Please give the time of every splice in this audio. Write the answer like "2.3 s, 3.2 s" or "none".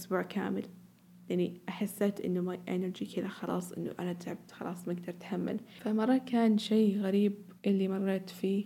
7.6 s